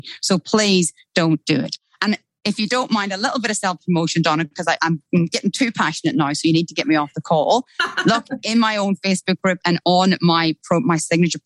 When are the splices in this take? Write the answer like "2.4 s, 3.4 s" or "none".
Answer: none